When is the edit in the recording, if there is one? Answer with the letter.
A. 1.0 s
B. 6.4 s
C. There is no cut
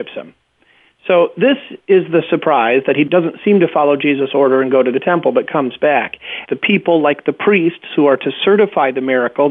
B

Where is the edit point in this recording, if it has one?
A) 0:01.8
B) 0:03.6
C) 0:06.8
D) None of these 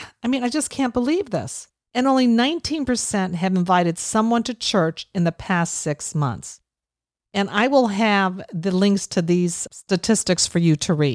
A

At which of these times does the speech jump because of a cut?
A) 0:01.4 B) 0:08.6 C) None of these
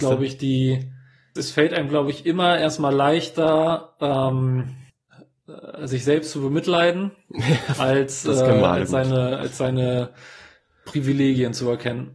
A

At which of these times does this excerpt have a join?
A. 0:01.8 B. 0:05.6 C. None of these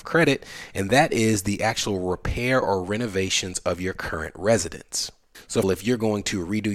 B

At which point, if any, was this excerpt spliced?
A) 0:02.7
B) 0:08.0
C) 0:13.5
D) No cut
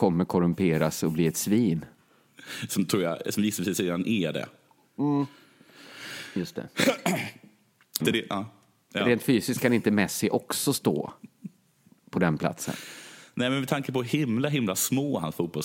B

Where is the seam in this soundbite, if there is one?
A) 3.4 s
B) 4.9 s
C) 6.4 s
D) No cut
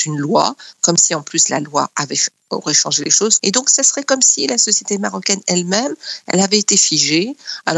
A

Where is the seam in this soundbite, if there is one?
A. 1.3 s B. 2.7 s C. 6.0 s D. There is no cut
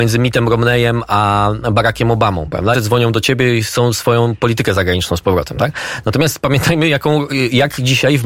B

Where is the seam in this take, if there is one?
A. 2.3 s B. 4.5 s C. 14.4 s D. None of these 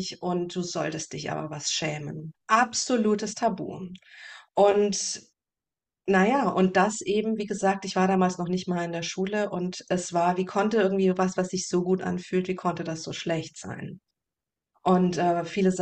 A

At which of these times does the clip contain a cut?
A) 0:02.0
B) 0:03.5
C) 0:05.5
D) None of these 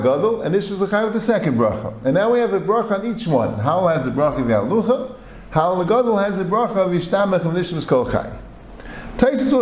D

